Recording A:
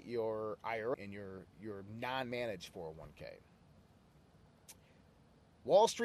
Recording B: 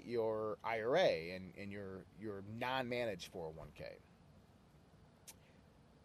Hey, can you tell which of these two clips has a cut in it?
A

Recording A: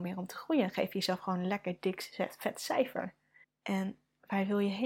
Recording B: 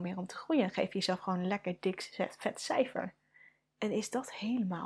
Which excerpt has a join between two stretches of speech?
A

